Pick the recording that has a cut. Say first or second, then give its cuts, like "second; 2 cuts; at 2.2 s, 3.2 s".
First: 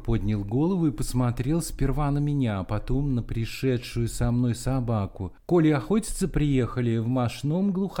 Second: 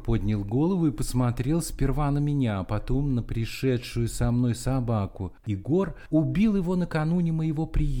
second; 1 cut; at 5.4 s